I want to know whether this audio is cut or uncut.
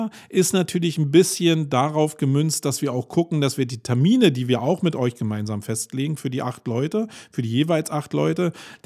uncut